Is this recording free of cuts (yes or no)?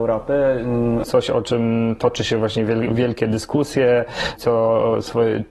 no